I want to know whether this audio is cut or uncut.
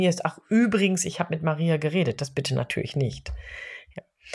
uncut